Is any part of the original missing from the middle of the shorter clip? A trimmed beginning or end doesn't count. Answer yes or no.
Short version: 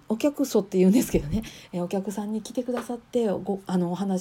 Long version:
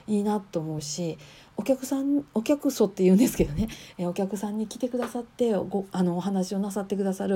no